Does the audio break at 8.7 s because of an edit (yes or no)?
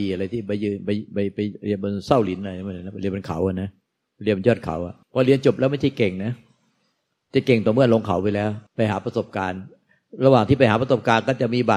yes